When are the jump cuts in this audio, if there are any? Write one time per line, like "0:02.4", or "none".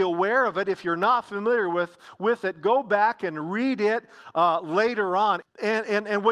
0:05.4